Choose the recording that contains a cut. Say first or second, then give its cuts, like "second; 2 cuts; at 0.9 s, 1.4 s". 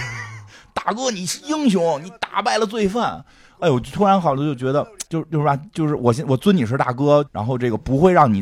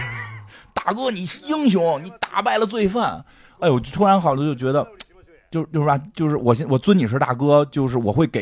first; 2 cuts; at 5.1 s, 7.3 s